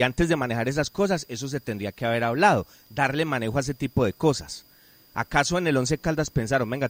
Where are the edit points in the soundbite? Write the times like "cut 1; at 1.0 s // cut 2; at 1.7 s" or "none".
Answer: none

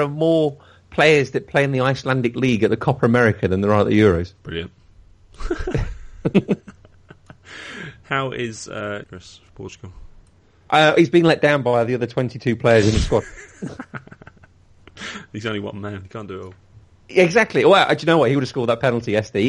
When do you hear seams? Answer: cut 1; at 9.0 s

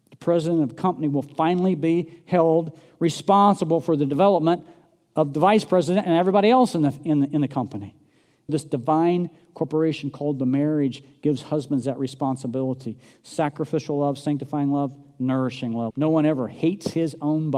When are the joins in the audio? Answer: cut 1; at 8.5 s // cut 2; at 15.9 s

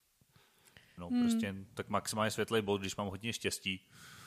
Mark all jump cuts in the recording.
cut 1; at 1.0 s

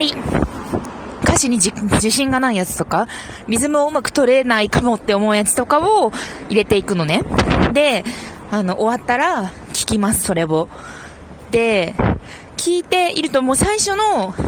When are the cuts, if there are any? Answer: none

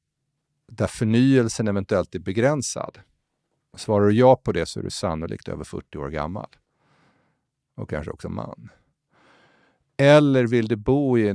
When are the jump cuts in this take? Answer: none

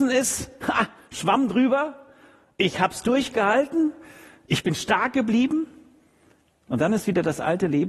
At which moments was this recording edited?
none

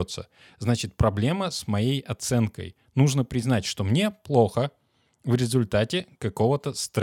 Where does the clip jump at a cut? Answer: none

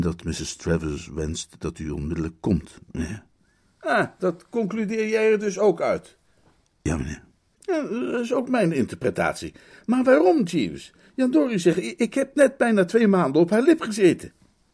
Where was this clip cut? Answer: none

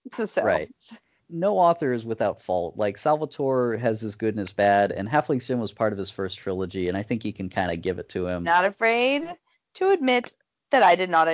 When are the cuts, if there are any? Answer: cut 1; at 8.4 s

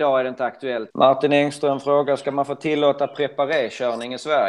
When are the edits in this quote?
cut 1; at 0.9 s

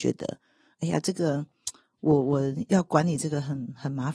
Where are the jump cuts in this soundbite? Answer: none

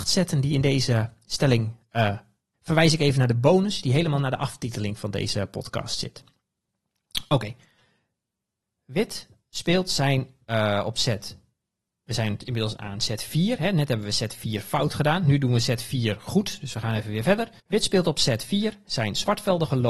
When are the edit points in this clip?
cut 1; at 2.5 s // cut 2; at 17.6 s

